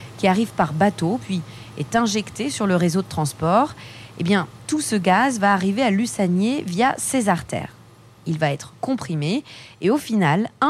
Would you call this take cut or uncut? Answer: uncut